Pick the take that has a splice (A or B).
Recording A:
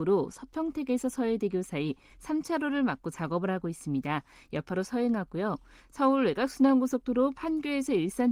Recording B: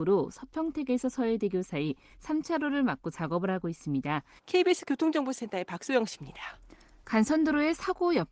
B